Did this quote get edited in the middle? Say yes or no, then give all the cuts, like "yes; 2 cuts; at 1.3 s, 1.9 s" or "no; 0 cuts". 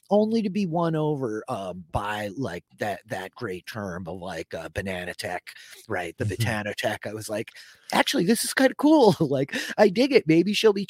no; 0 cuts